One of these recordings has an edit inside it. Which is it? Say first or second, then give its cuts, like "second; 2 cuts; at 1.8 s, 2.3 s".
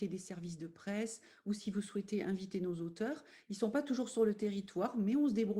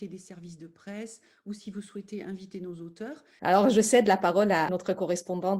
second; 2 cuts; at 3.4 s, 4.7 s